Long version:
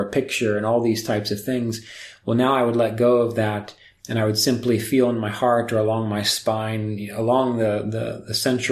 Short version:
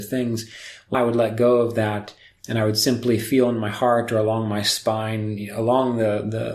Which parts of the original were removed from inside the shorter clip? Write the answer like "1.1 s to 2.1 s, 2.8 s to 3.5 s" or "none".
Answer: 2.3 s to 2.5 s

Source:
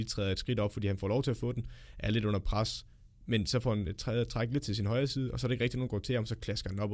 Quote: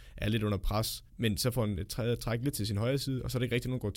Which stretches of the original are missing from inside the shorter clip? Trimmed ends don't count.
2.9 s to 3.2 s

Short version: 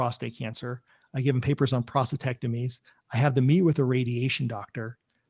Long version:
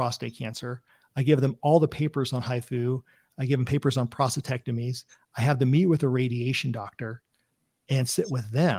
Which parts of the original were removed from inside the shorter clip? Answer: 1.0 s to 3.3 s

